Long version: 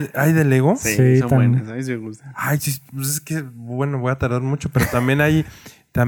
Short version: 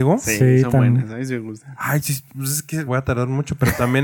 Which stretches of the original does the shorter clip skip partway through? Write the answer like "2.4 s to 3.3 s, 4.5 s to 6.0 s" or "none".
3.4 s to 4.0 s